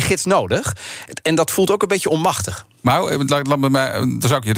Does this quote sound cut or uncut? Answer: uncut